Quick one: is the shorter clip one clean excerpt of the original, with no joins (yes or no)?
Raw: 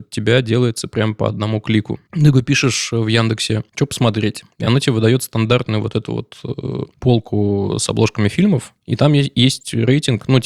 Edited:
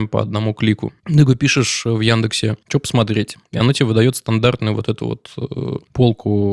yes